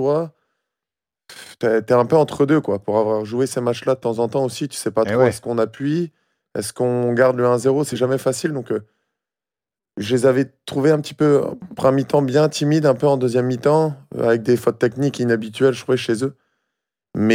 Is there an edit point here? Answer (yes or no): no